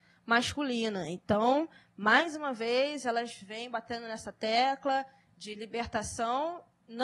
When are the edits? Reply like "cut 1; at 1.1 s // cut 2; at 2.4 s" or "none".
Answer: none